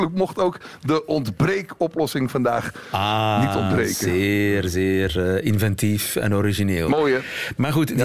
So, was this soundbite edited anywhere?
no; 0 cuts

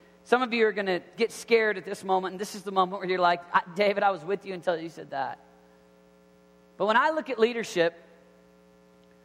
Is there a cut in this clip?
no; 0 cuts

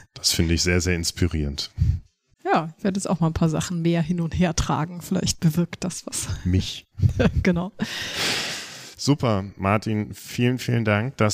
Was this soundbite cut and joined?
no; 0 cuts

